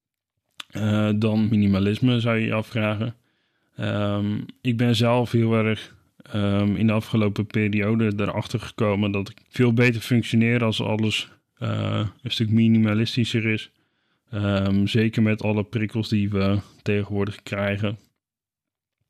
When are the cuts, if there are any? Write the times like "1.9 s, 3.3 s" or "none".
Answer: 9.4 s